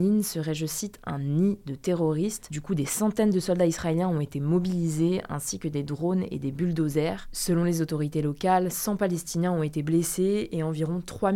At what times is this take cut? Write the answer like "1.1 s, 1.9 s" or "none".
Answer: none